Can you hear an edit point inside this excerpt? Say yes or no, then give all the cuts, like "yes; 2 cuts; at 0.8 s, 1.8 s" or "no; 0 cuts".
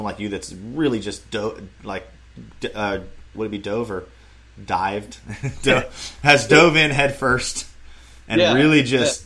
yes; 1 cut; at 3.3 s